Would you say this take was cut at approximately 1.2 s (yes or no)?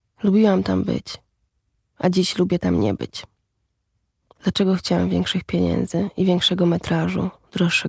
no